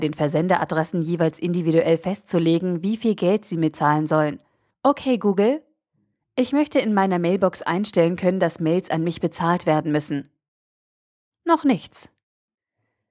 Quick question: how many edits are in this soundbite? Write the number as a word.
two